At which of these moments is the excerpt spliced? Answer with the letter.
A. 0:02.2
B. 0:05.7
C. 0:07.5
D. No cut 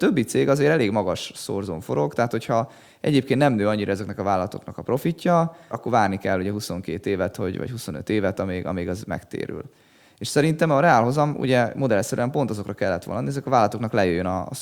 B